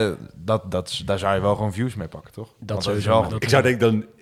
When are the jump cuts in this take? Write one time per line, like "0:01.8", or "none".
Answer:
0:03.3